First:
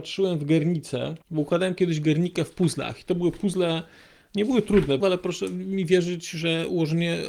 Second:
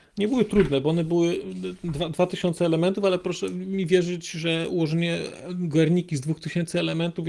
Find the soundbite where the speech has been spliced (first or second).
first